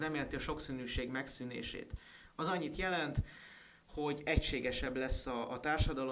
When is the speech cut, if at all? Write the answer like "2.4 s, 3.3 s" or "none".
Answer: none